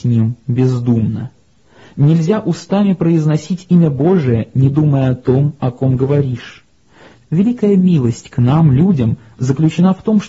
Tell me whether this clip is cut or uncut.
uncut